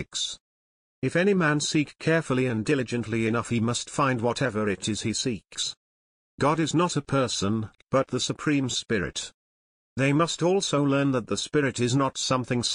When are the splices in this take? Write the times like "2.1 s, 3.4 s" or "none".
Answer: none